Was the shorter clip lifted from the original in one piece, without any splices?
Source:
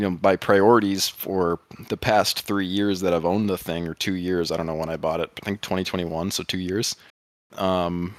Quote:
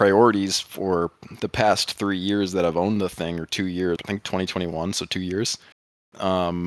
no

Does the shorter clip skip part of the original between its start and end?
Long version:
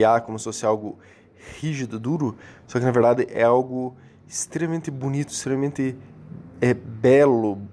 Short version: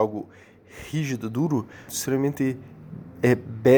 yes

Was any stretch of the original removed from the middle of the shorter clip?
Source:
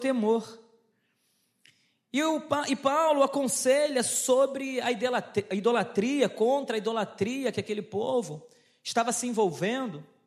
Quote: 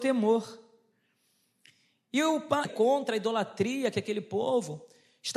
yes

